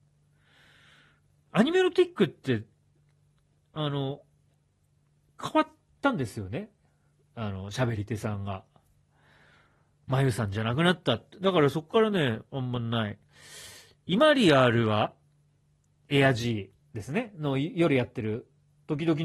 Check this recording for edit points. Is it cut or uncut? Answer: cut